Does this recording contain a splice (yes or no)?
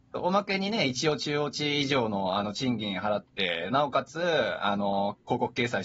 no